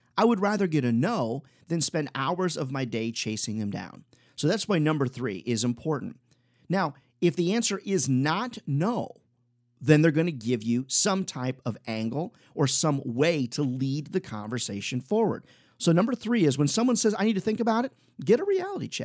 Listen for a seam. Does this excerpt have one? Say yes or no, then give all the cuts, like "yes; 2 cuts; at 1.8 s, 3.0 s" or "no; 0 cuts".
no; 0 cuts